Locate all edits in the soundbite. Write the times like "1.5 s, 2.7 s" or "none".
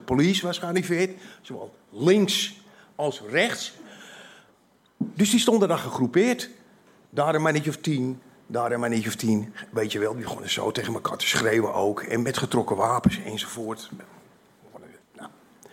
none